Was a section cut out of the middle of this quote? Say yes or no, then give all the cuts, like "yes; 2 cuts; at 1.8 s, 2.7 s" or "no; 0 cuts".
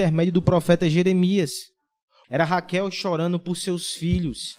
yes; 1 cut; at 2.2 s